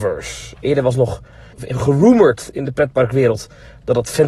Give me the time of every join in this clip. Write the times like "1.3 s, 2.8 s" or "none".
1.5 s